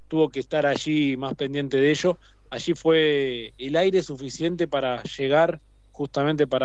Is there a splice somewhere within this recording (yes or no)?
yes